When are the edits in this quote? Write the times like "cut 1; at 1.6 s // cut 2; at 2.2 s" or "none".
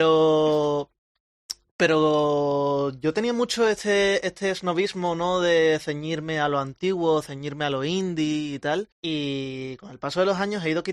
cut 1; at 8.9 s